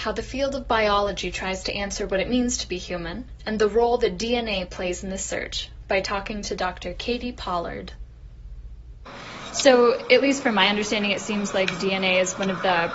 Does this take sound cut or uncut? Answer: uncut